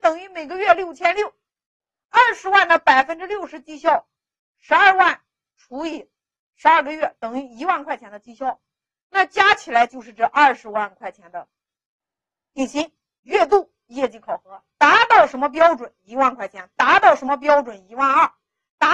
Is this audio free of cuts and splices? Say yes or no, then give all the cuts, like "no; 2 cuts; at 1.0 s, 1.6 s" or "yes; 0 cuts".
no; 1 cut; at 13.2 s